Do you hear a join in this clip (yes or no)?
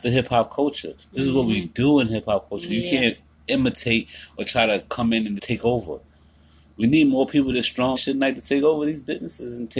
yes